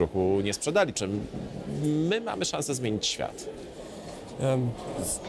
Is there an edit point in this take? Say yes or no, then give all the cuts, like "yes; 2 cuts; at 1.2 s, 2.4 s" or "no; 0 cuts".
yes; 1 cut; at 0.9 s